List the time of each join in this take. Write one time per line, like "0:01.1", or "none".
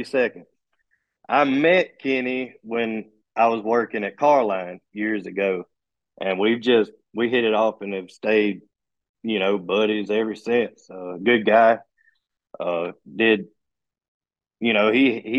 none